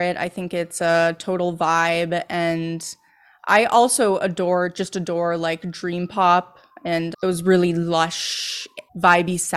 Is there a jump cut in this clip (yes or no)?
no